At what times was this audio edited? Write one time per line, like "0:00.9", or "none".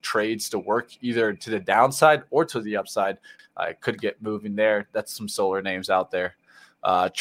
0:03.4